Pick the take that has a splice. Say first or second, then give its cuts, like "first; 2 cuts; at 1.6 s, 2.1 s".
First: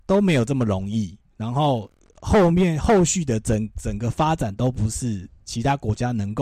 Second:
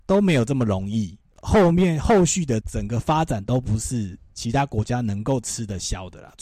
second; 2 cuts; at 1.3 s, 2.6 s